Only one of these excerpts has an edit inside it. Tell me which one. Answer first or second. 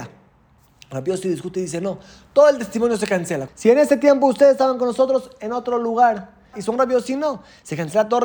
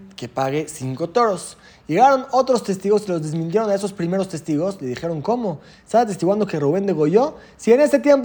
first